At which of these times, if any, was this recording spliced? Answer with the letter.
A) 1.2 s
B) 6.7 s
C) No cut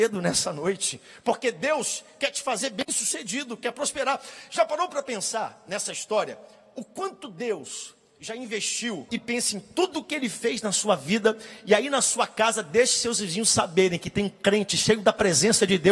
C